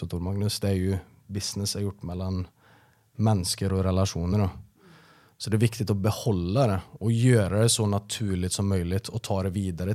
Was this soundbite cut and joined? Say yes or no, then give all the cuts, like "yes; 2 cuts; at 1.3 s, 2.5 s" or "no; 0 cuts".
no; 0 cuts